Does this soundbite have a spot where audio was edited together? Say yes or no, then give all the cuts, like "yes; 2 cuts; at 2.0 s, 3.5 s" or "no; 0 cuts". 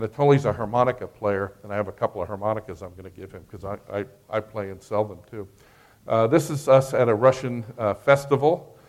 no; 0 cuts